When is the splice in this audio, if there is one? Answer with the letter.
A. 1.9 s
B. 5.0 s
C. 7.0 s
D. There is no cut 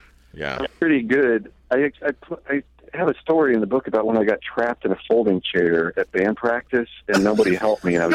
A